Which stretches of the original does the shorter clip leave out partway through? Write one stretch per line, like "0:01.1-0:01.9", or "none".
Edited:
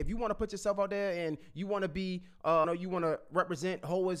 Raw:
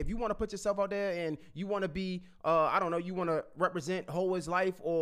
0:02.6-0:02.9